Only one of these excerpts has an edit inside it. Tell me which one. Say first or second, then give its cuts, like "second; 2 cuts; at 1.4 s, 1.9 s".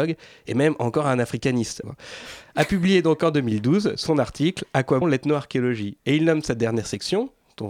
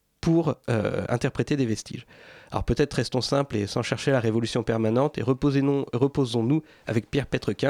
first; 2 cuts; at 1.8 s, 5.0 s